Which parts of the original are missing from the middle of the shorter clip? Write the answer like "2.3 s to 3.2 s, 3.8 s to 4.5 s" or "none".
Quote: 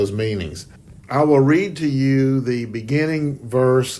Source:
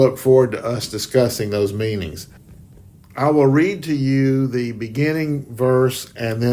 2.6 s to 3.1 s